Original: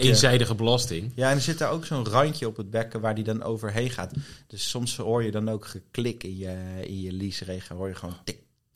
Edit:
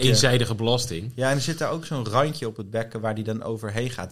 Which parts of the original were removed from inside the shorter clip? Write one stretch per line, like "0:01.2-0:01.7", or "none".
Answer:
none